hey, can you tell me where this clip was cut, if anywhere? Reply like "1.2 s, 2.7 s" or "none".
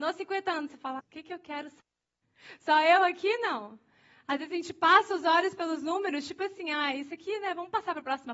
1.0 s